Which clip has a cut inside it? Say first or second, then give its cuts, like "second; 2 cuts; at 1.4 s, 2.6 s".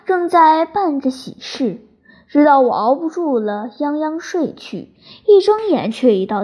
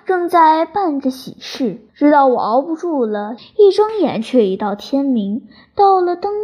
second; 2 cuts; at 1.9 s, 3.4 s